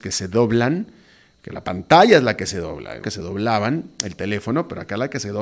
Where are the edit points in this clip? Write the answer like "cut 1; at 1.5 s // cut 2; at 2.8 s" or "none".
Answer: cut 1; at 3.0 s